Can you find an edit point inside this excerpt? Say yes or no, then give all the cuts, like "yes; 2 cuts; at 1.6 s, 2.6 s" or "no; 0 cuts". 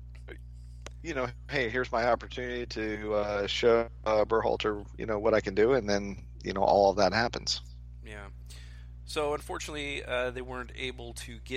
no; 0 cuts